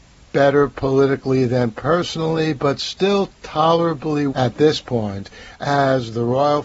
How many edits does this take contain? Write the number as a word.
one